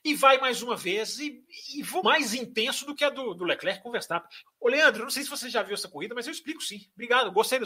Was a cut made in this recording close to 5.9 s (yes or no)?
no